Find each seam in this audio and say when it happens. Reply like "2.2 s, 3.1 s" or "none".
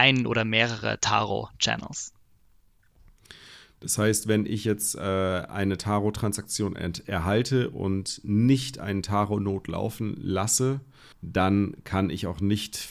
11.1 s